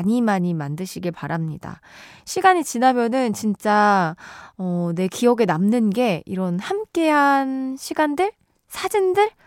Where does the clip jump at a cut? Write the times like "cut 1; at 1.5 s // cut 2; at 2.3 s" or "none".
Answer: none